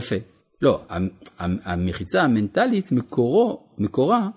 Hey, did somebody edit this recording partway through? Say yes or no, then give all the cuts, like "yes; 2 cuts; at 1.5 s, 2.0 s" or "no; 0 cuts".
no; 0 cuts